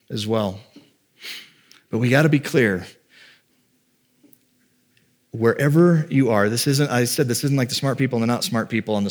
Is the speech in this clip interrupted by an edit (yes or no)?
no